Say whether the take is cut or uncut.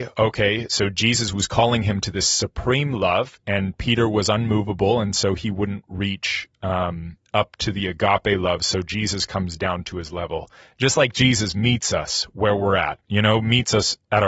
uncut